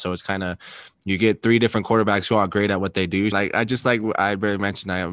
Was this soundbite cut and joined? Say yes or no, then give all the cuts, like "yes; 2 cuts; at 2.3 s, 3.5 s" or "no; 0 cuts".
yes; 1 cut; at 3.3 s